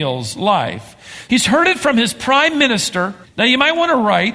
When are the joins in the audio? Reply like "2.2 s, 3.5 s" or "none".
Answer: 1.3 s, 3.2 s